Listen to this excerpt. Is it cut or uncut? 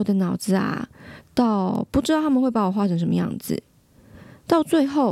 cut